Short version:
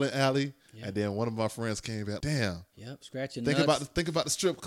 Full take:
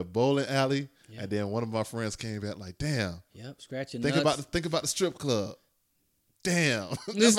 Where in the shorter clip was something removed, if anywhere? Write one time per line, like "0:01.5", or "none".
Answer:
0:02.2